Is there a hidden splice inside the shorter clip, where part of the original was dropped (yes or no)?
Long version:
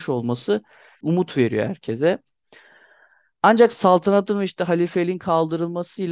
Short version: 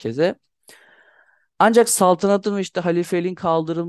no